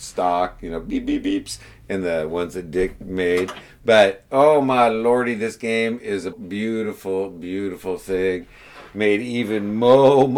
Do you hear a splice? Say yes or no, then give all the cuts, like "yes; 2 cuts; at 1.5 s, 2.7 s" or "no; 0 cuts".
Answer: yes; 1 cut; at 6.3 s